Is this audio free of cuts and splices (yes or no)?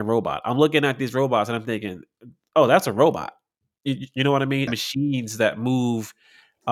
no